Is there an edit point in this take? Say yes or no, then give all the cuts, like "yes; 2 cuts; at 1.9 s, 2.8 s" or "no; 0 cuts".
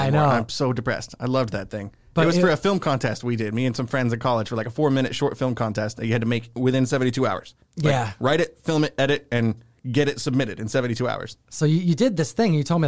no; 0 cuts